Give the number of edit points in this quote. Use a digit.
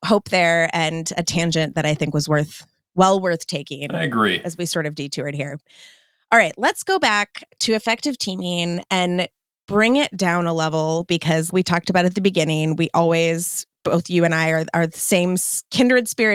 1